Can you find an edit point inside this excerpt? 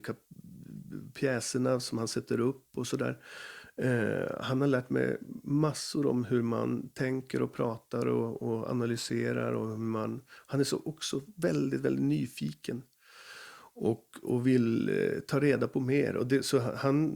no; 0 cuts

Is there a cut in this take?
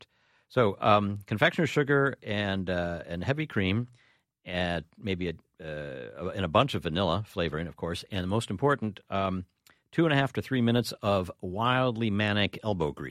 no; 0 cuts

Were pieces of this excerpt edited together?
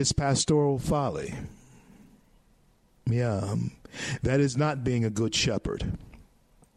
no; 0 cuts

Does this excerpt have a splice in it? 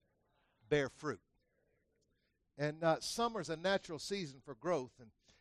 no; 0 cuts

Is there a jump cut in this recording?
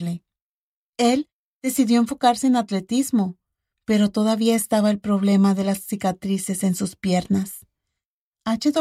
no; 0 cuts

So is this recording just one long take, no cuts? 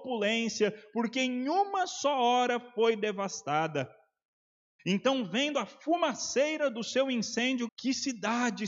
no; 2 cuts; at 4.8 s, 7.7 s

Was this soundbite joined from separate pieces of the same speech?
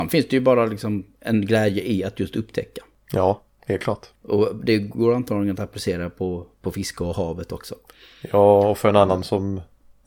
no; 0 cuts

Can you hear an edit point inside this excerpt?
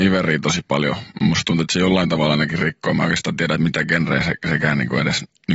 no; 0 cuts

